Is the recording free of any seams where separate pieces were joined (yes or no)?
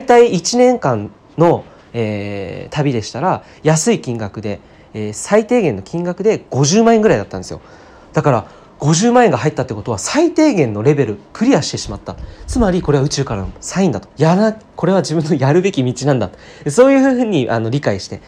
no